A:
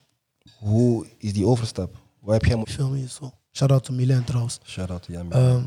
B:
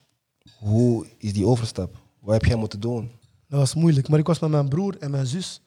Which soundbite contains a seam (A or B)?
A